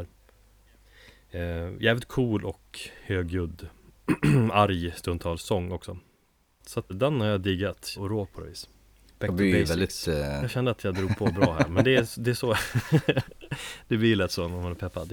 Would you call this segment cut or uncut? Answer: cut